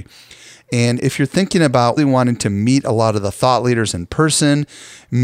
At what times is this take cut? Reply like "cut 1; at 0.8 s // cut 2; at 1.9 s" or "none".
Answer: cut 1; at 2.0 s